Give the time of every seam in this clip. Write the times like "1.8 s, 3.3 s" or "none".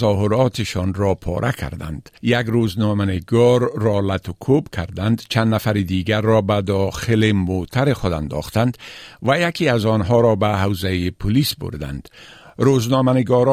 2.2 s